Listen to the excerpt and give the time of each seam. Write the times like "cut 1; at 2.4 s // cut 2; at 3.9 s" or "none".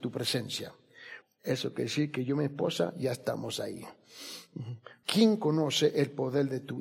cut 1; at 1.2 s // cut 2; at 5.0 s